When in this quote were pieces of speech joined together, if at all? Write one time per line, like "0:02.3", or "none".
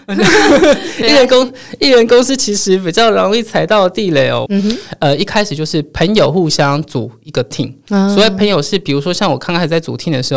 0:04.5